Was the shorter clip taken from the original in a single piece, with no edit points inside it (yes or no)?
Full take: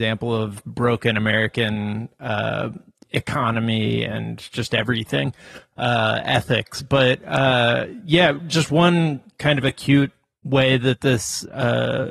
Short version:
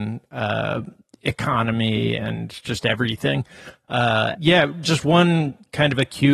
no